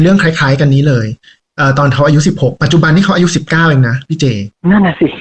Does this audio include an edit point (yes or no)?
no